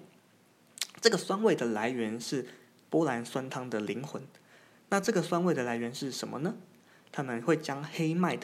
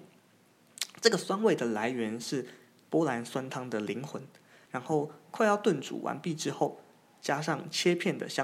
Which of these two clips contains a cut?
second; 1 cut; at 4.7 s

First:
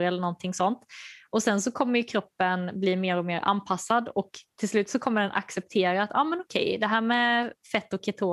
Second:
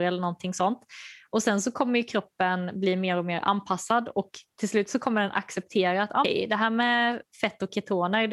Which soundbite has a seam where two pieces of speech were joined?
second; 1 cut; at 6.2 s

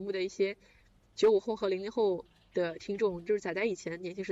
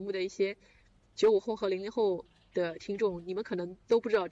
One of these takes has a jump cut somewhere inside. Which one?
first; 1 cut; at 3.2 s

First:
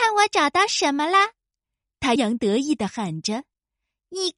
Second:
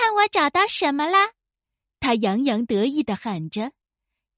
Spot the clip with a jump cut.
first; 1 cut; at 2.2 s

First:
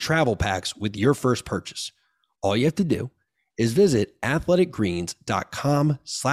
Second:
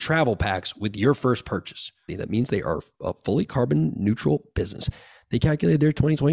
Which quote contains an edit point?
second; 1 cut; at 2.1 s

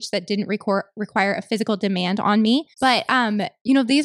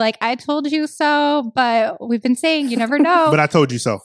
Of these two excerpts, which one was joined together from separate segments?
first; 1 cut; at 2.7 s

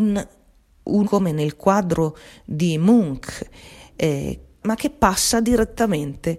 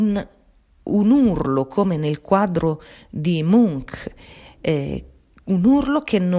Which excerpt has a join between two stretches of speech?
first; 2 cuts; at 1.0 s, 4.6 s

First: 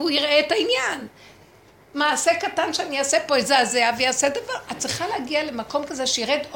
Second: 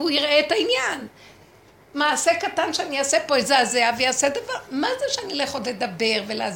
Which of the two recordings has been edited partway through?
first; 1 cut; at 4.7 s

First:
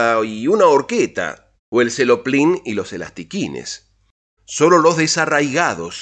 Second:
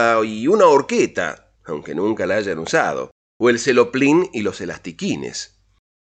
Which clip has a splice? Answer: first; 2 cuts; at 1.6 s, 4.4 s

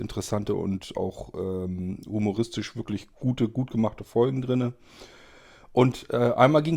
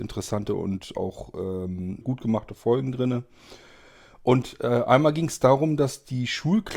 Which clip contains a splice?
second; 1 cut; at 2.0 s

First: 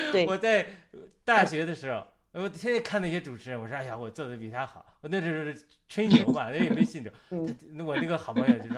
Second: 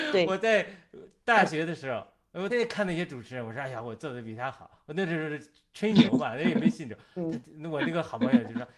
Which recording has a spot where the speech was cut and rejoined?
second; 1 cut; at 2.5 s

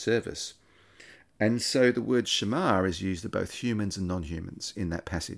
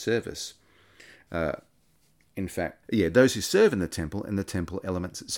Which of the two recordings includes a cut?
second; 2 cuts; at 1.3 s, 2.8 s

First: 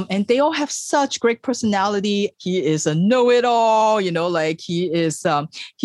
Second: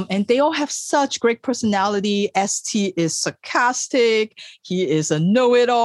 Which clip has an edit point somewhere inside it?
first; 1 cut; at 2.3 s

